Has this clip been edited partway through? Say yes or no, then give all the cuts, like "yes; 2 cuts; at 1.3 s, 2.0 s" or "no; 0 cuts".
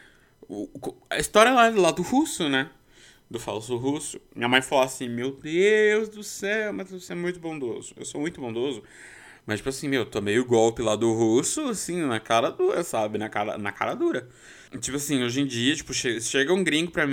yes; 1 cut; at 14.7 s